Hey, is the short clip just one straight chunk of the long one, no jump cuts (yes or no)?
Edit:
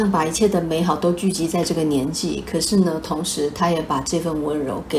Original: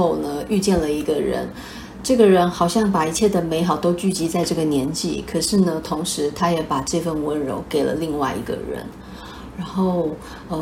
yes